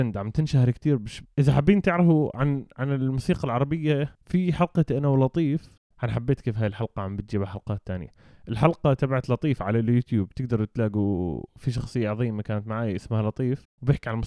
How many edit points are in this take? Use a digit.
1